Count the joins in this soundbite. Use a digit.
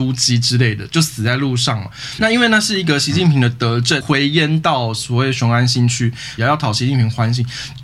3